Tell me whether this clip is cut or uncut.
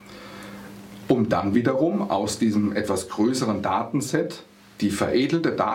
uncut